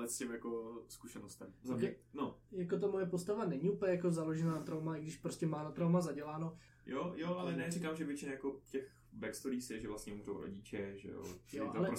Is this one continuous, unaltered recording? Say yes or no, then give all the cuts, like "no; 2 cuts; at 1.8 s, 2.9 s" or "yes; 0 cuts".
no; 1 cut; at 6.7 s